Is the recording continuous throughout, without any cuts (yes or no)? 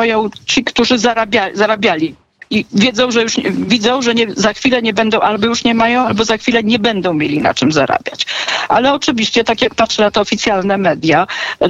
yes